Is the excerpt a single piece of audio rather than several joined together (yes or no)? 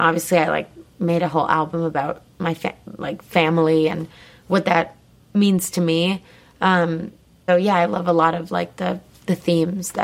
no